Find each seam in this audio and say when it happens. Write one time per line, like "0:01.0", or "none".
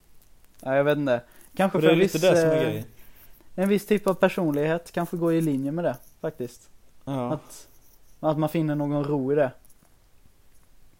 none